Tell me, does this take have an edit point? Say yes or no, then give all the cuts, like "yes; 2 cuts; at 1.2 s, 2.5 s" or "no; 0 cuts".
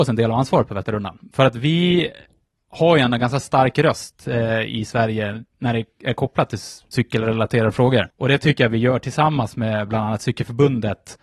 yes; 2 cuts; at 6.9 s, 8.1 s